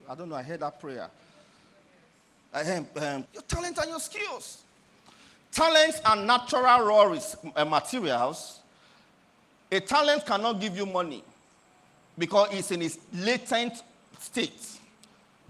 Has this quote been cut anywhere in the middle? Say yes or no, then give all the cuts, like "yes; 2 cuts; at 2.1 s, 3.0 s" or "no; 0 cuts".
yes; 1 cut; at 3.3 s